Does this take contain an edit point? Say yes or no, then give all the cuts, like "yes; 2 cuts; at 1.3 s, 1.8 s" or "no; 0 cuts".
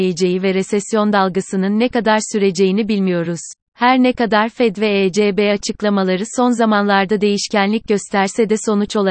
yes; 1 cut; at 3.6 s